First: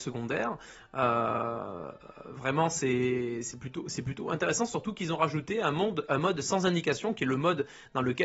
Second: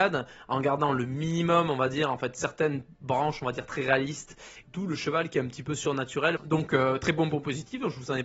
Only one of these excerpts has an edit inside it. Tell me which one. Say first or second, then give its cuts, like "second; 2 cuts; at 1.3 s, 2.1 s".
second; 2 cuts; at 4.6 s, 6.4 s